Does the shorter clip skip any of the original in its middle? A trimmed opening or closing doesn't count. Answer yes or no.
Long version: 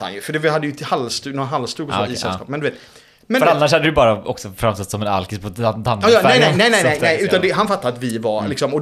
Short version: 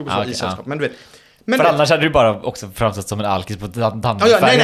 no